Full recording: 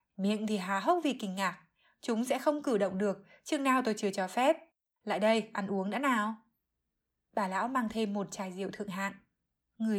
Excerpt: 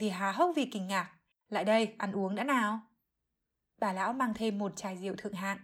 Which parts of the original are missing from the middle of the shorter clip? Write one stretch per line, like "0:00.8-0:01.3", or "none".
0:01.8-0:04.9